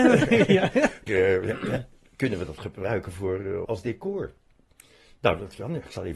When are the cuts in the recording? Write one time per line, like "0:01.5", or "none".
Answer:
0:01.1
0:03.6